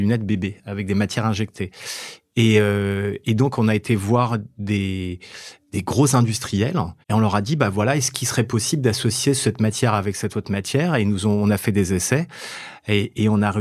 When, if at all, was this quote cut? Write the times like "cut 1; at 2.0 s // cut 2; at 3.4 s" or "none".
cut 1; at 7.0 s